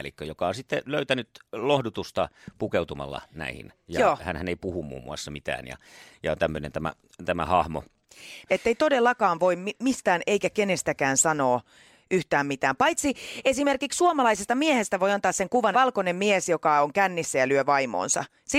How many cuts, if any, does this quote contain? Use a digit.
2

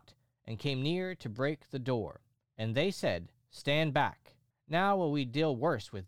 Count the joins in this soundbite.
2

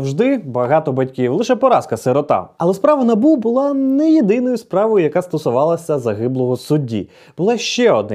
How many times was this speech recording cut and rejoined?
0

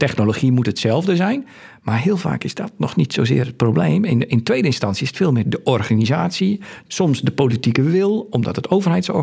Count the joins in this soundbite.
1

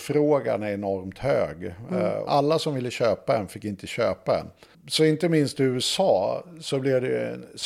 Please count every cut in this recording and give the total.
2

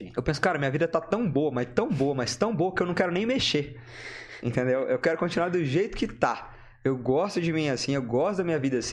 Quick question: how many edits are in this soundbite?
0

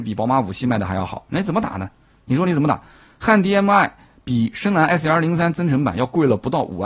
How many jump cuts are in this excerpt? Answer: 0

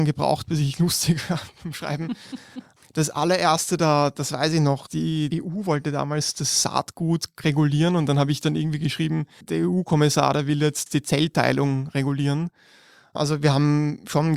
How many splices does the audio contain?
0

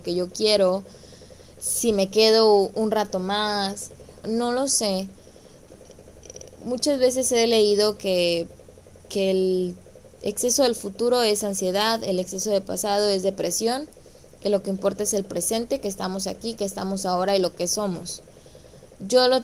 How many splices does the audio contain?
1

